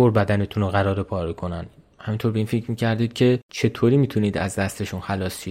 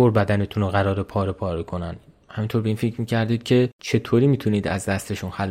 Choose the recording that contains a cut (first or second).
first